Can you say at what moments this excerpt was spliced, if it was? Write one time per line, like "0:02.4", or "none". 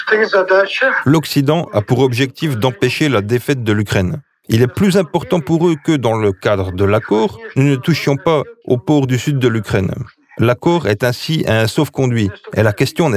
none